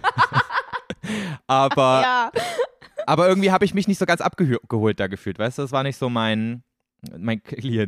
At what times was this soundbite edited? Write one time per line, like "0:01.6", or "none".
none

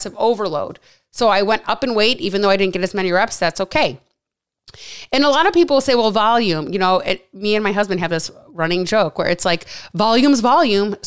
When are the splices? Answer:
none

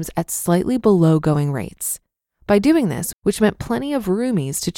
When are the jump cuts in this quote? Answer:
0:03.1

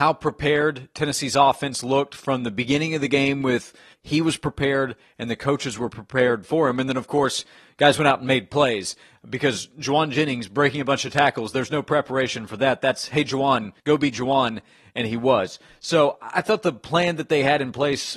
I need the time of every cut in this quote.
0:03.9
0:13.8

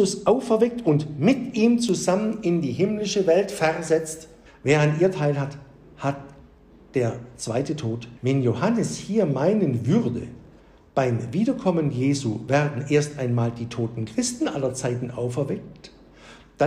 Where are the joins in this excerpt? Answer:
0:04.5
0:08.2

